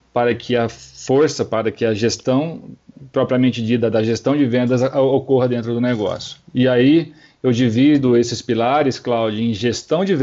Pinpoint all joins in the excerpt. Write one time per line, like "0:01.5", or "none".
0:06.4